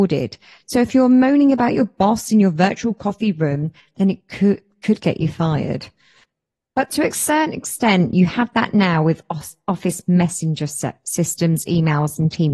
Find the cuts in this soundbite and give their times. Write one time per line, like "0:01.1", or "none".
none

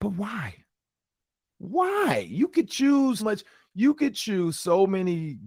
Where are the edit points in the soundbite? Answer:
0:03.2

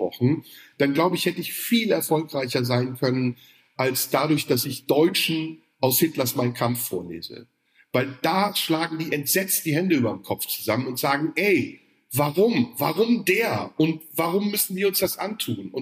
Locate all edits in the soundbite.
none

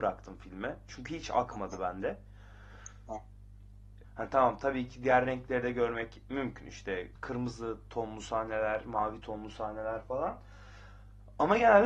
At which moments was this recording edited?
0:04.0
0:07.2

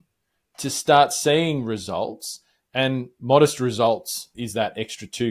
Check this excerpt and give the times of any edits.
0:04.3

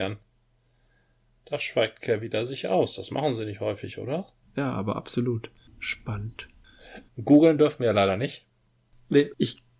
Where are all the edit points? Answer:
0:04.4
0:05.6
0:07.1

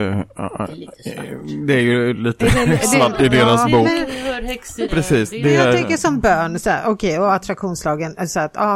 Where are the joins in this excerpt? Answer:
0:04.9

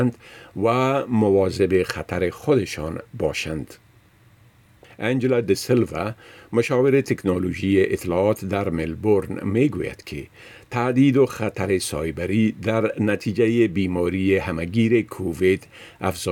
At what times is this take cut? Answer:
none

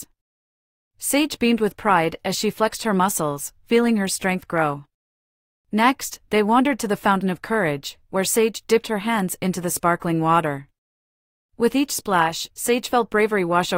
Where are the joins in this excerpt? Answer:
0:11.4

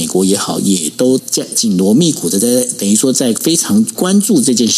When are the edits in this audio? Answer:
0:01.2

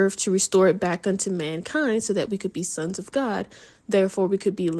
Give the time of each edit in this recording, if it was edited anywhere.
none

